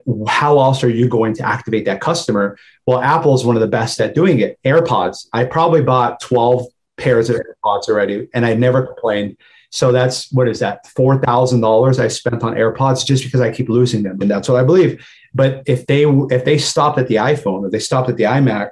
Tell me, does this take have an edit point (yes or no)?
yes